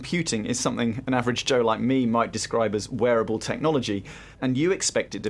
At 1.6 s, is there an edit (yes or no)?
no